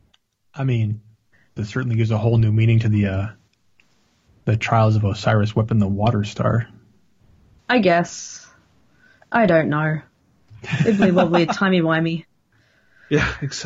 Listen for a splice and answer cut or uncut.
cut